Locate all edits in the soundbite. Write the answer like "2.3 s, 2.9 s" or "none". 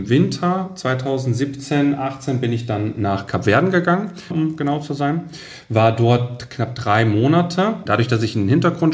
4.3 s, 7.9 s